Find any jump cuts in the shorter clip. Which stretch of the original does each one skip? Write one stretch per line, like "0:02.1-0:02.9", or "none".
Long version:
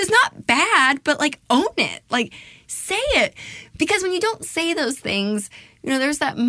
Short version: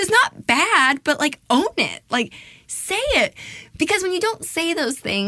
none